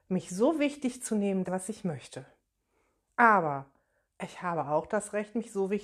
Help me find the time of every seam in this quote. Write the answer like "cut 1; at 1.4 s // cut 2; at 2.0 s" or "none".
cut 1; at 1.4 s